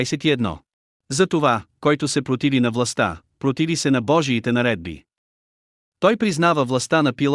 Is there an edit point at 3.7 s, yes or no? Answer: no